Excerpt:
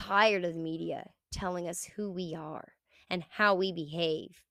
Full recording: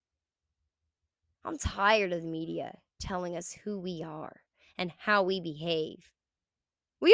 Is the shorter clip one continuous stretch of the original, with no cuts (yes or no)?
yes